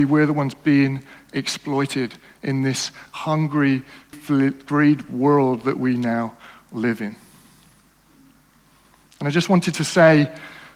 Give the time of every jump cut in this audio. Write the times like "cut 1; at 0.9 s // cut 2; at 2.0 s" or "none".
cut 1; at 4.1 s